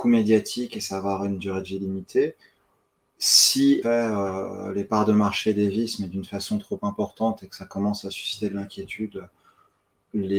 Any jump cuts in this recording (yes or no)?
yes